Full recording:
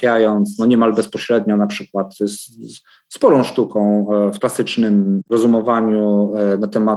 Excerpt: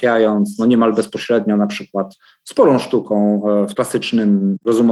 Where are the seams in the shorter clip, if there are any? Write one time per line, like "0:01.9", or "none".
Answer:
0:02.1